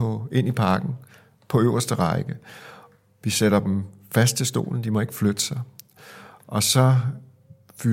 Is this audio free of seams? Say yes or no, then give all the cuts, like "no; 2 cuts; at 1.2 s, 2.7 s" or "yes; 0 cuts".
yes; 0 cuts